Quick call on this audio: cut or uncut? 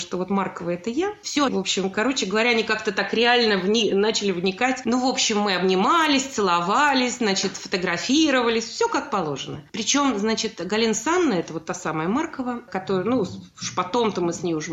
cut